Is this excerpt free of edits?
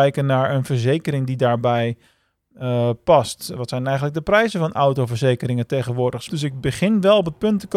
no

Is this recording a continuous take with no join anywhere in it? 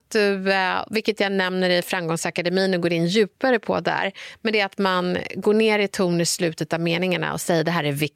yes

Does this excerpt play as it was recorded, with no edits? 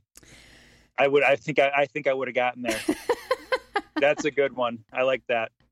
no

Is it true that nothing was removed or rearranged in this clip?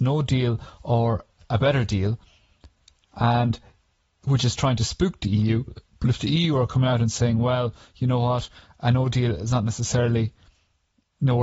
yes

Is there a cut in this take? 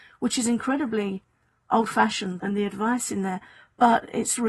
yes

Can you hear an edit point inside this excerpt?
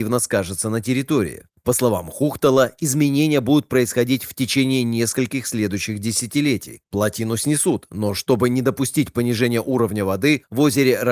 no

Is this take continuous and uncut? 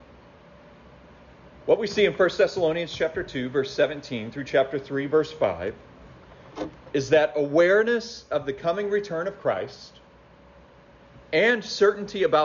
yes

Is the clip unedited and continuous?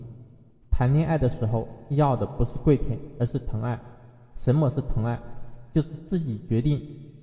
yes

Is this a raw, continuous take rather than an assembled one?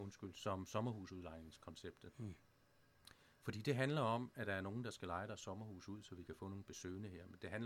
yes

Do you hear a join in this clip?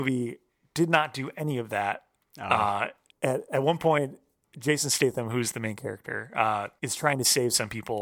yes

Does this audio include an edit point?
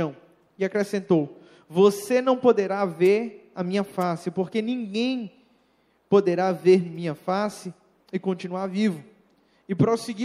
no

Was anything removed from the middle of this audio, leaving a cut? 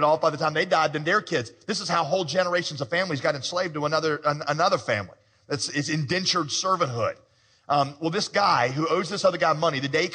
no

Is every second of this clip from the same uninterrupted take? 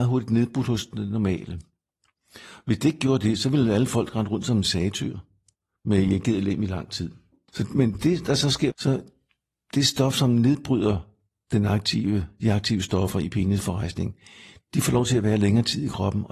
no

